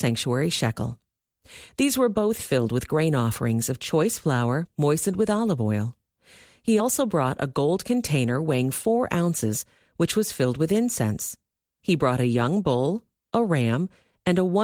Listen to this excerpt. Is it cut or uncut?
uncut